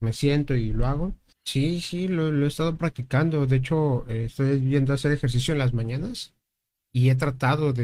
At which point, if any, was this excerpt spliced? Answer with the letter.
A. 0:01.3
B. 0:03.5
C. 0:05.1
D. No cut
A